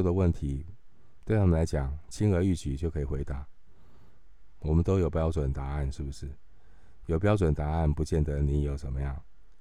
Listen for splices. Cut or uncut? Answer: uncut